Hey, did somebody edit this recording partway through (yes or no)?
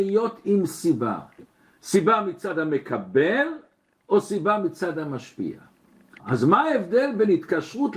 yes